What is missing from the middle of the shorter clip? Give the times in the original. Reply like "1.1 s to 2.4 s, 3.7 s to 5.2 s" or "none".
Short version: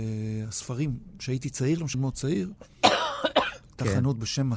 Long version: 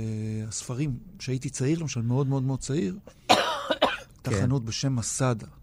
1.9 s to 2.4 s